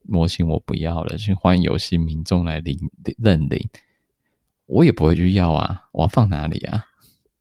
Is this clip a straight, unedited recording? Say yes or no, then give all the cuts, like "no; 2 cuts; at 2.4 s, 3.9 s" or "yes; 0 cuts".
yes; 0 cuts